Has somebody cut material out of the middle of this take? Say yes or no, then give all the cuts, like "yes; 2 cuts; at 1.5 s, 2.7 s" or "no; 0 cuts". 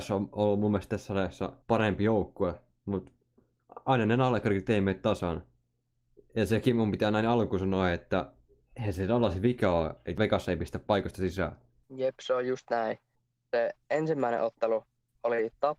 yes; 1 cut; at 1.6 s